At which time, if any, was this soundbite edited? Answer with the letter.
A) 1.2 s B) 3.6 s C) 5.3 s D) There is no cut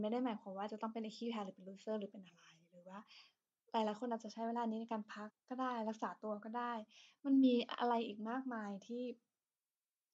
C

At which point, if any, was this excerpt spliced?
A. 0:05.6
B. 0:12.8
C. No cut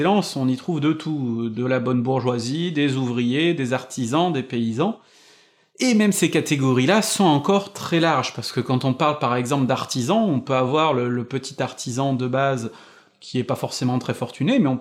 C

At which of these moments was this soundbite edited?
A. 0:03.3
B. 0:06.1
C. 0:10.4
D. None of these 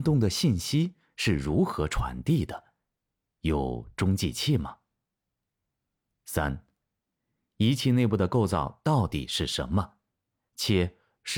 D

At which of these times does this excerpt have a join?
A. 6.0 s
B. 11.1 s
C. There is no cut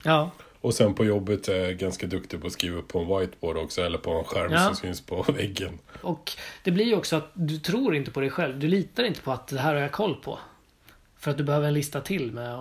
A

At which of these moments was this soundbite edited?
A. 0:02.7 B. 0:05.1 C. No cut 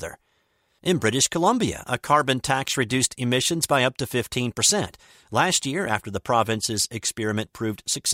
C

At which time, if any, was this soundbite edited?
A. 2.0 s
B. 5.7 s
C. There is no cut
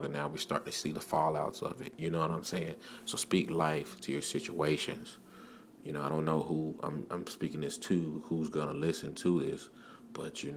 C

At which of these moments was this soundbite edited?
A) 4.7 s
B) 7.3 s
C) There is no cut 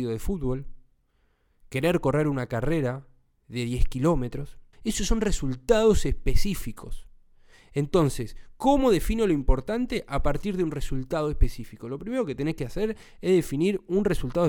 A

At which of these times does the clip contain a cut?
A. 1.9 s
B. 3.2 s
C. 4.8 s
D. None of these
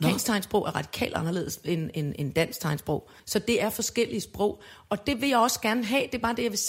B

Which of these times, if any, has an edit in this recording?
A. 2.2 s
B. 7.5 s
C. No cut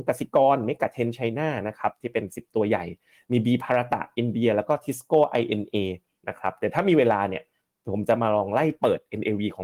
C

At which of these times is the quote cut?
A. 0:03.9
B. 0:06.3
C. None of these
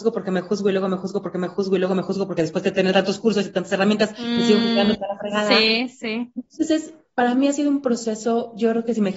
C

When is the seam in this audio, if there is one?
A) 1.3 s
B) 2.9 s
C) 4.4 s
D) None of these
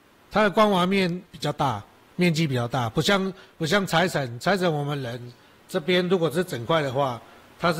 A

